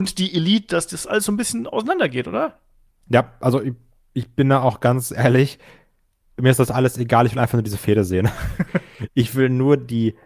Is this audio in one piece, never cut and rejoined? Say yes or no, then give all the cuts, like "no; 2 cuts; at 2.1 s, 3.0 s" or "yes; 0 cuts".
yes; 0 cuts